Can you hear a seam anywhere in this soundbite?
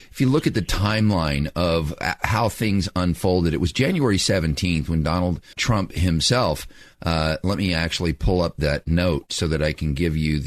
yes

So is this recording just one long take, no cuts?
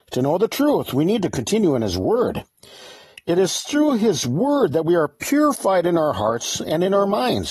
yes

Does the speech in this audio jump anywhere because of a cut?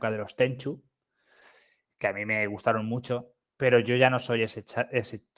no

